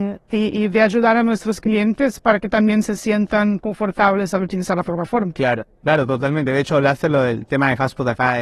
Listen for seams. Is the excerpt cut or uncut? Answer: uncut